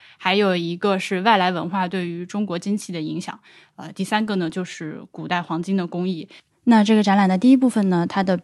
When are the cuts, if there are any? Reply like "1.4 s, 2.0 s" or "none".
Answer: none